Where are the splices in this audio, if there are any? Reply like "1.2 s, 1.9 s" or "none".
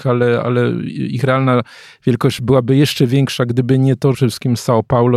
4.1 s